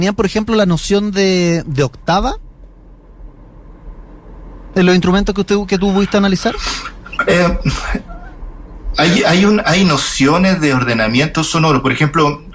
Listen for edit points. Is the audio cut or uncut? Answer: uncut